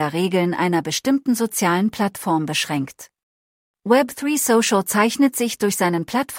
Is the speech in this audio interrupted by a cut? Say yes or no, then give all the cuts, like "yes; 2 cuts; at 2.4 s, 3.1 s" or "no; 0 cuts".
yes; 1 cut; at 3.7 s